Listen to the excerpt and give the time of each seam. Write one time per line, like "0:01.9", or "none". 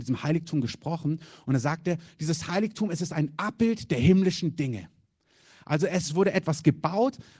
none